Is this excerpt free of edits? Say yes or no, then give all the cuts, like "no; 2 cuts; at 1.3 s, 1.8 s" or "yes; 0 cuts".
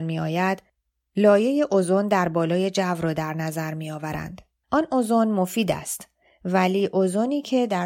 no; 1 cut; at 4.6 s